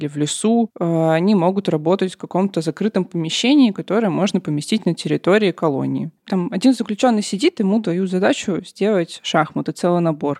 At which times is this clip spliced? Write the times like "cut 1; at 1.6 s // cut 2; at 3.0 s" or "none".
cut 1; at 6.2 s